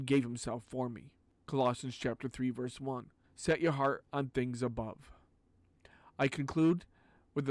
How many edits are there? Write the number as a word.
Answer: one